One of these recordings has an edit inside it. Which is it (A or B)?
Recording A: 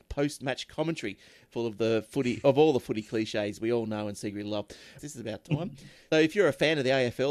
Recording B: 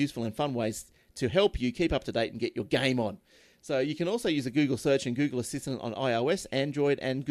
A